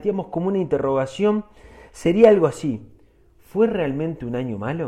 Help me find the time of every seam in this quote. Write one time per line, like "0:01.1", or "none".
none